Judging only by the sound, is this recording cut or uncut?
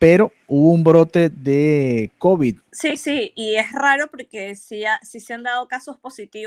cut